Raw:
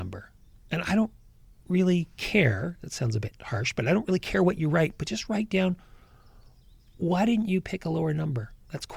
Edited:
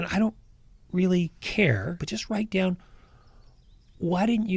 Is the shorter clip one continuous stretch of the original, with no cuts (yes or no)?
no